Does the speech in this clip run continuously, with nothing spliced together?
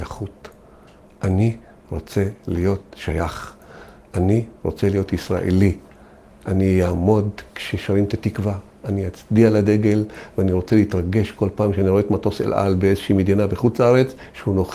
yes; 0 cuts

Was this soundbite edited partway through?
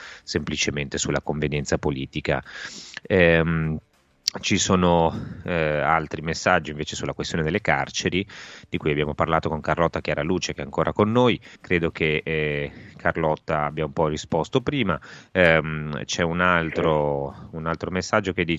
yes; 1 cut; at 11.6 s

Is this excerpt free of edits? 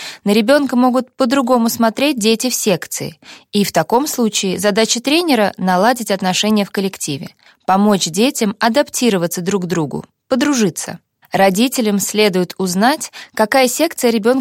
yes; 0 cuts

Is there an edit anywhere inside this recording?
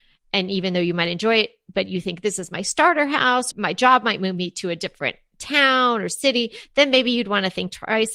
yes; 1 cut; at 3.5 s

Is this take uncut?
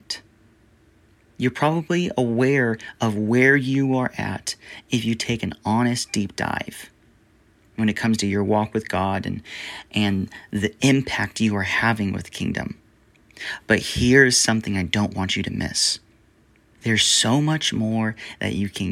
no; 1 cut; at 16.8 s

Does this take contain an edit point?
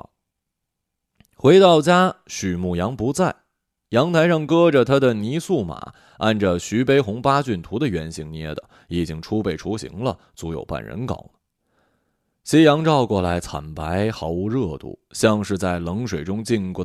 no; 0 cuts

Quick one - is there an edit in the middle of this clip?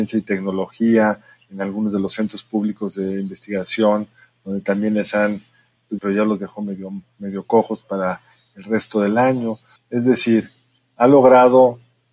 yes; 2 cuts; at 6.0 s, 9.8 s

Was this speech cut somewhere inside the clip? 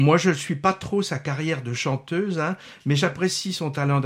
no; 0 cuts

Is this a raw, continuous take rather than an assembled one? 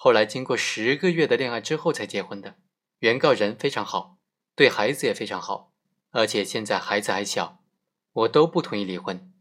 no; 3 cuts; at 2.9 s, 5.9 s, 8.0 s

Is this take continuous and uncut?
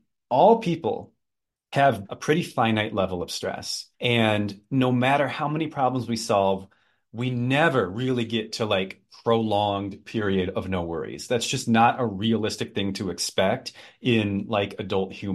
no; 2 cuts; at 2.0 s, 3.9 s

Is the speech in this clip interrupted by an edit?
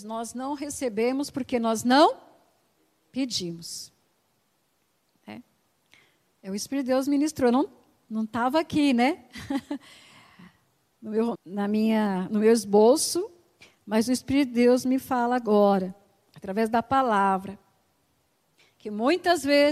yes; 1 cut; at 11.4 s

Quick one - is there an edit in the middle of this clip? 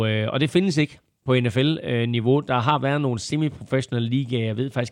no; 0 cuts

